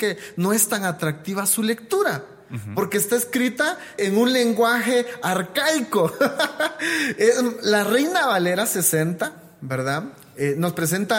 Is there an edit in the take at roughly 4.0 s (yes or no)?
yes